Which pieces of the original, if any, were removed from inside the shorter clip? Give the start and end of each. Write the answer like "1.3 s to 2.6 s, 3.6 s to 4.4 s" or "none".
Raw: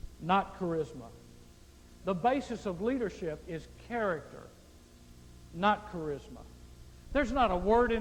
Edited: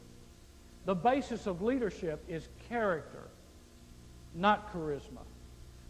none